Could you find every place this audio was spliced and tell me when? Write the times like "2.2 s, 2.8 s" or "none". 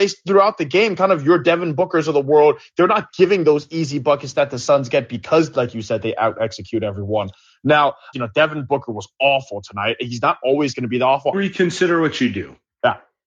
8.1 s, 11.3 s

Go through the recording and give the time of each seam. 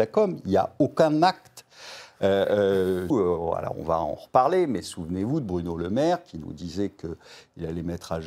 3.1 s

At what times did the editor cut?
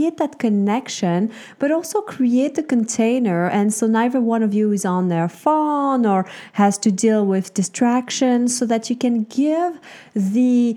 none

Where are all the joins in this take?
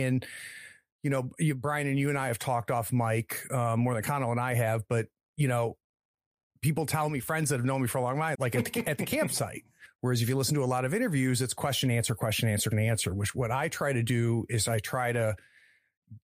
8.4 s, 9.9 s, 12.7 s

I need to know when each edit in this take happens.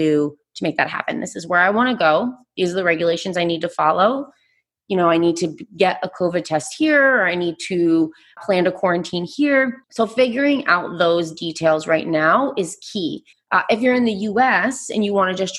8.4 s, 9.8 s, 13.3 s

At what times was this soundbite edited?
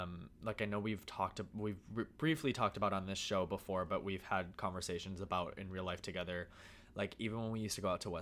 5.5 s

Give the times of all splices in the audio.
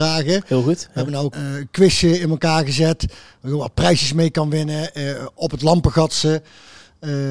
1.3 s

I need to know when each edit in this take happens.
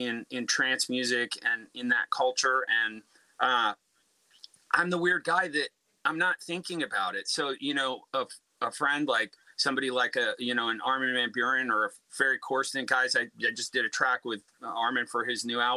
none

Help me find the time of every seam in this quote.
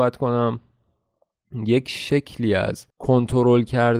2.9 s

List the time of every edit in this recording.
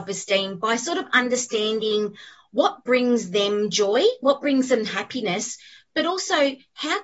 none

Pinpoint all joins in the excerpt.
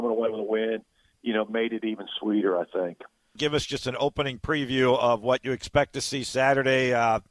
3.4 s

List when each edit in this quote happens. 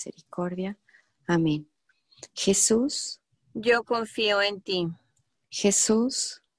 none

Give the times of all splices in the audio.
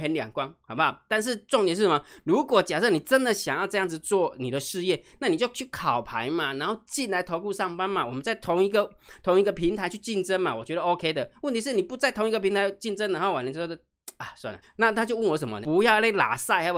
14.6 s, 15.6 s

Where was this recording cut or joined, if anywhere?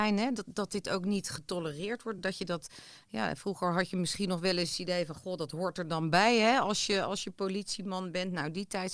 none

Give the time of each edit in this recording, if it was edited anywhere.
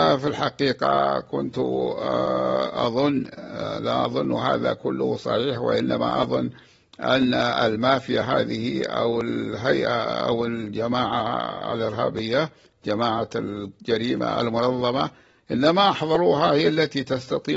none

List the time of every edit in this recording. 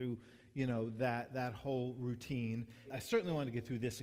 2.8 s

